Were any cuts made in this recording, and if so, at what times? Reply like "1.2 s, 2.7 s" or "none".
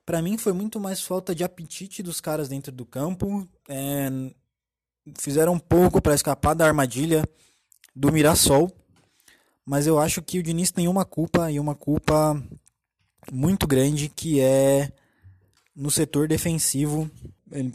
none